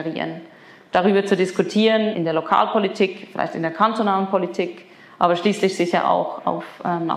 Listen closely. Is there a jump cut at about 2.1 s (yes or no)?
yes